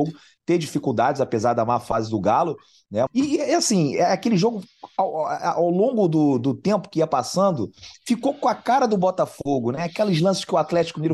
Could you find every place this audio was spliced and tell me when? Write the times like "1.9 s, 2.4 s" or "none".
3.1 s